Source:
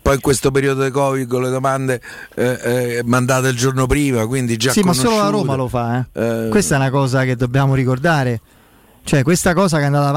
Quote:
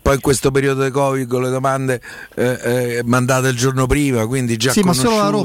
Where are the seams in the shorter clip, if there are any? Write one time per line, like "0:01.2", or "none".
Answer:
none